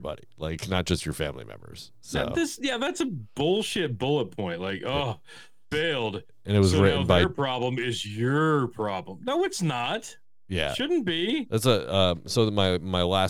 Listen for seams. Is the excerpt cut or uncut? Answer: cut